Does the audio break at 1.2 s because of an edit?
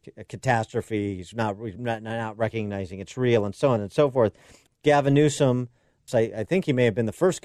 no; 2 cuts; at 4.7 s, 6.1 s

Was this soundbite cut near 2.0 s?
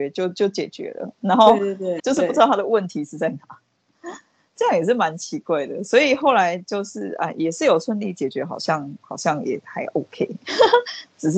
yes; 1 cut; at 2.0 s

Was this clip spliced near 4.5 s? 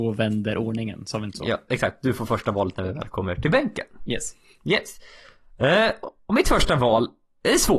no; 1 cut; at 1.7 s

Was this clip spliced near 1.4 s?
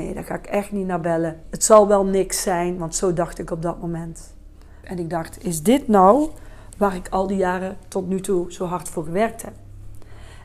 yes; 2 cuts; at 1.4 s, 4.8 s

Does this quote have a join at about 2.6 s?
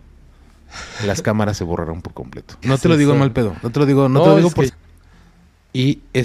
yes; 2 cuts; at 2.6 s, 4.7 s

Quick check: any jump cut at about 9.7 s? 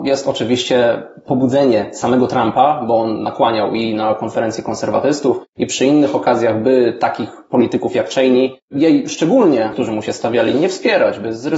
yes; 1 cut; at 9.7 s

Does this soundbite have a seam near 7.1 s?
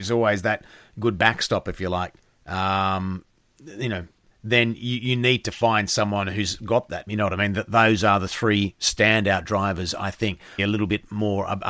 yes; 2 cuts; at 7.1 s, 10.6 s

